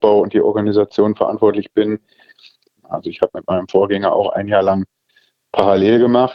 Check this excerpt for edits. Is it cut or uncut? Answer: cut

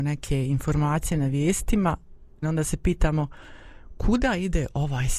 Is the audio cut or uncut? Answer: cut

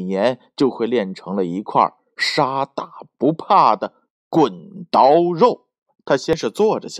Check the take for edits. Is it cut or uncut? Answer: cut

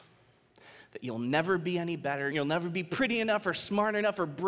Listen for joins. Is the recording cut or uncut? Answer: cut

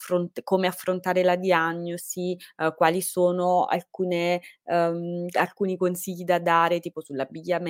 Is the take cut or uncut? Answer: uncut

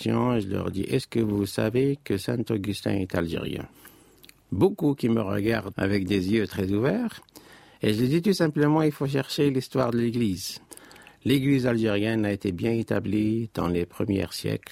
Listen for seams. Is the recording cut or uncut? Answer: uncut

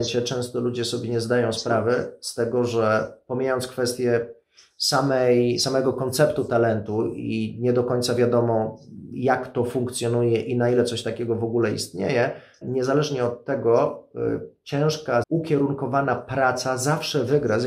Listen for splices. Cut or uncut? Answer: cut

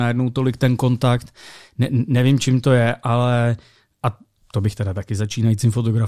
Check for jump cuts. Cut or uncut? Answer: cut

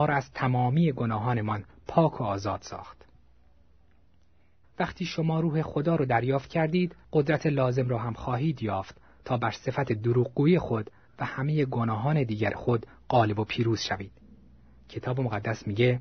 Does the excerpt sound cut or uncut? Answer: cut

